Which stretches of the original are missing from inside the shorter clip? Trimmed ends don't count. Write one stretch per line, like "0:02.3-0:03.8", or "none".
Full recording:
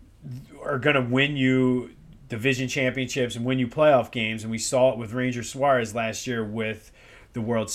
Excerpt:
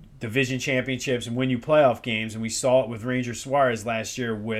none